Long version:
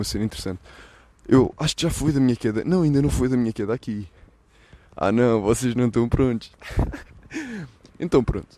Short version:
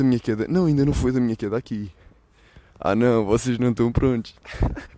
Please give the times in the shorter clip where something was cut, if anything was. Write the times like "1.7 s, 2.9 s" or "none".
none